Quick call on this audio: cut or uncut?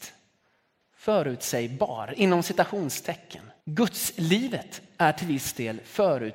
cut